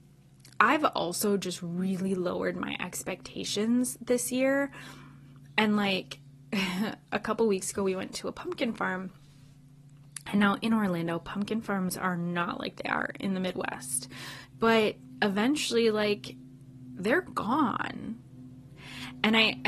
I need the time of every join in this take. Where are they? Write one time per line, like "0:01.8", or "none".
0:14.5